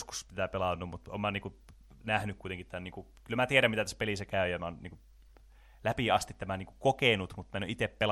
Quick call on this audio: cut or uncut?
uncut